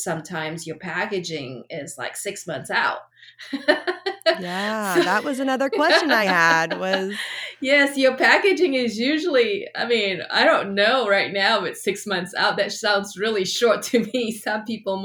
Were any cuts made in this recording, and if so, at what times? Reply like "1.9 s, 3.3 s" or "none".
none